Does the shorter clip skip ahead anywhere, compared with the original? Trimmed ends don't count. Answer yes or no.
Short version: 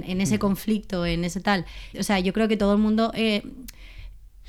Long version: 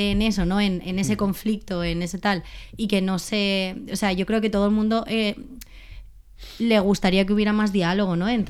yes